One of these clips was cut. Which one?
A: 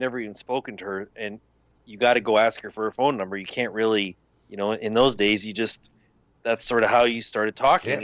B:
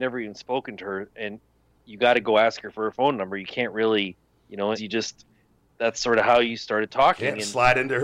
B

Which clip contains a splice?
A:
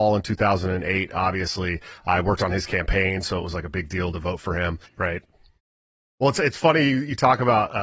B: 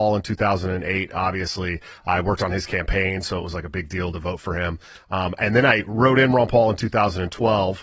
A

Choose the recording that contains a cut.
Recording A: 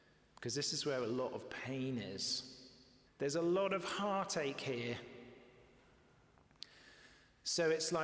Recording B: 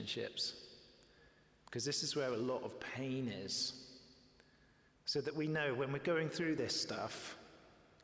A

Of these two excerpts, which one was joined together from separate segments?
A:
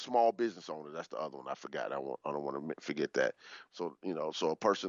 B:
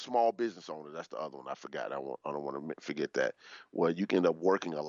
A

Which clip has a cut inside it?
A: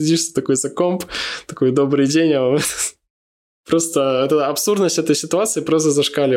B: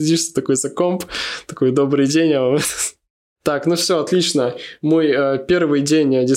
B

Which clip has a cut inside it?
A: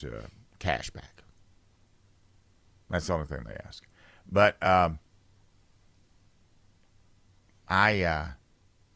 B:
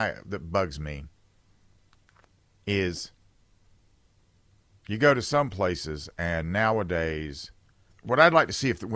B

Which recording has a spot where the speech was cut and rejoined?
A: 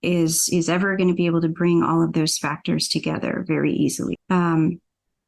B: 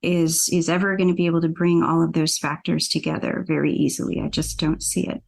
A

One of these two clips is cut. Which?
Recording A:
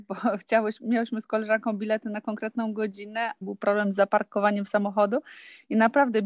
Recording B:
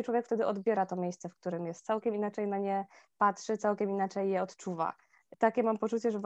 A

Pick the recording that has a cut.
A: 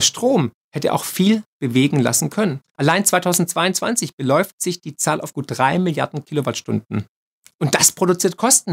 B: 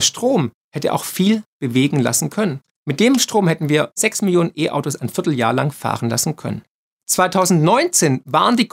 A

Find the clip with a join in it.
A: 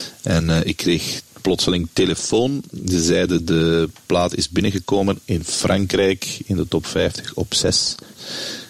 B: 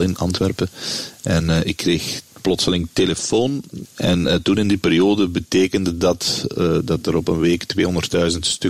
B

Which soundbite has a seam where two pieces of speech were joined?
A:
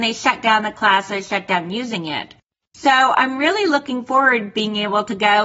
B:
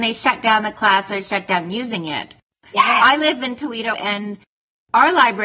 B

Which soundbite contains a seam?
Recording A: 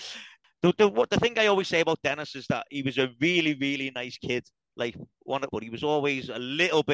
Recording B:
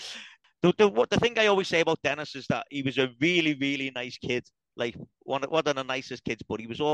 A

